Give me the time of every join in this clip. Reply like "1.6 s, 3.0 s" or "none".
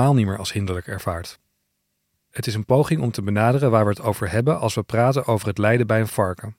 2.2 s